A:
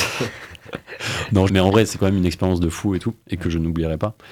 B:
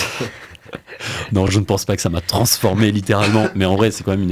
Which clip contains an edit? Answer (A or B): A